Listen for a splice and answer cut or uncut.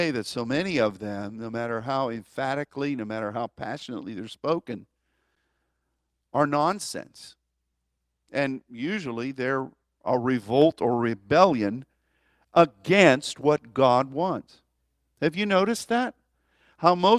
uncut